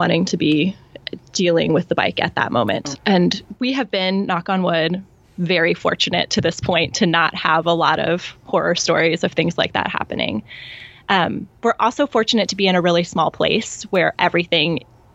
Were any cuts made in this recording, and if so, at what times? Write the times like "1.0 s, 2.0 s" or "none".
2.9 s